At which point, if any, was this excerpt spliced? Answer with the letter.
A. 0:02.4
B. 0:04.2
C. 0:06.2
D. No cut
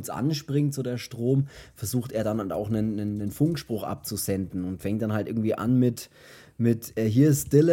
D